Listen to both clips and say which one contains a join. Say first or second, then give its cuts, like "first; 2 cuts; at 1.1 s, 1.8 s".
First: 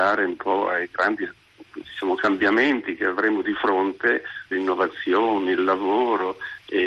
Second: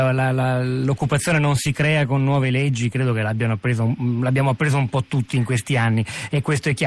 first; 2 cuts; at 1.7 s, 4.5 s